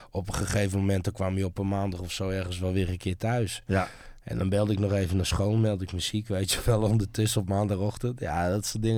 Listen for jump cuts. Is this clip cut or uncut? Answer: uncut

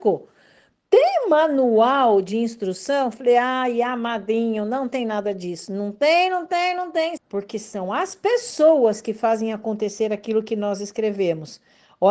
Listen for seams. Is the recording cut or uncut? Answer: cut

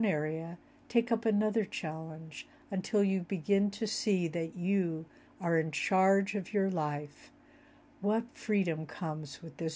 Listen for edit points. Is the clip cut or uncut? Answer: cut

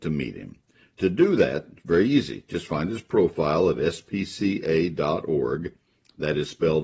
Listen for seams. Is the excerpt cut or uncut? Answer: uncut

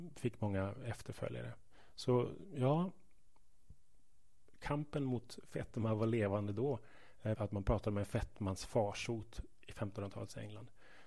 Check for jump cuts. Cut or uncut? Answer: cut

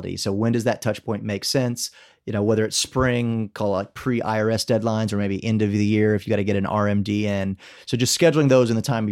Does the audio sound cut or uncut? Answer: uncut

